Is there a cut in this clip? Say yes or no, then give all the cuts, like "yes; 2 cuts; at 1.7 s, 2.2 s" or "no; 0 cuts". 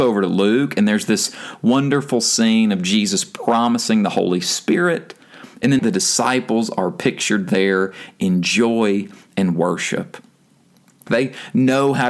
yes; 2 cuts; at 5.8 s, 11.1 s